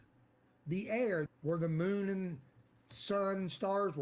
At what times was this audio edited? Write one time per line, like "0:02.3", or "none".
0:01.3